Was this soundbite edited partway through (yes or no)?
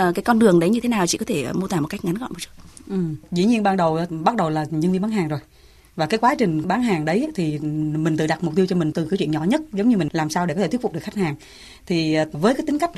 no